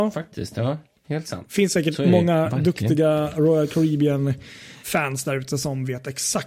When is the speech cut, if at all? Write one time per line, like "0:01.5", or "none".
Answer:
0:04.8

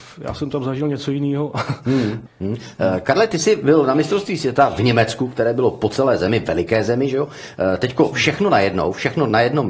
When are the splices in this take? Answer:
0:02.3

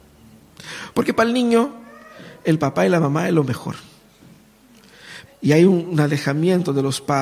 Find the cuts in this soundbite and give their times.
0:00.9
0:05.3

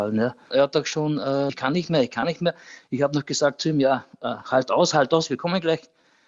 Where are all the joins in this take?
0:01.5

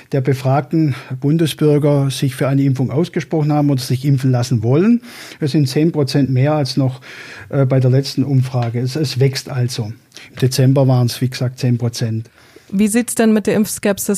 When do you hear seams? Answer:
none

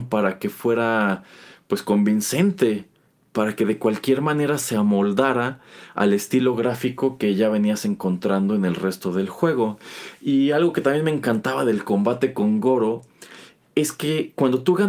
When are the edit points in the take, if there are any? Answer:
none

